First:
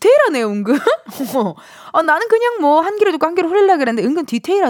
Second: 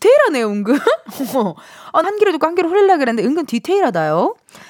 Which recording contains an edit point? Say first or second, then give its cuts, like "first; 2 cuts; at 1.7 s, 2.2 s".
second; 1 cut; at 2.0 s